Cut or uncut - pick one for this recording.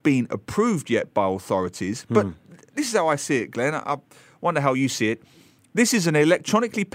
uncut